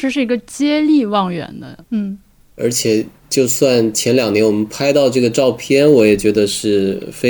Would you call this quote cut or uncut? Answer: cut